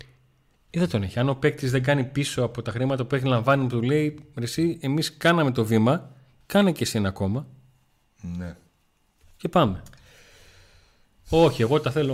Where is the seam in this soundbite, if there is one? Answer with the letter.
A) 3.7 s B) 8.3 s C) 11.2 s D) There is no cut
D